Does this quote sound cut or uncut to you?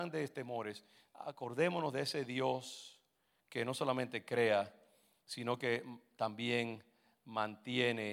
uncut